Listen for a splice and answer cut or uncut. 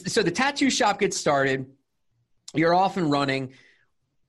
uncut